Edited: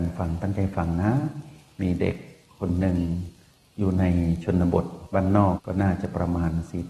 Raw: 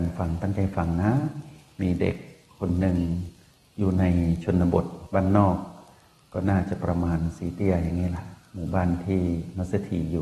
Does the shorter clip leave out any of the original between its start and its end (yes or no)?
yes